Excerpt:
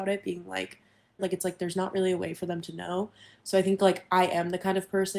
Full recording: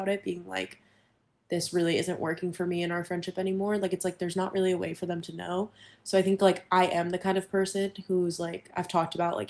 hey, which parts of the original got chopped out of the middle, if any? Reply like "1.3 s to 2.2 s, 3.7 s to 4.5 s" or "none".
1.2 s to 3.8 s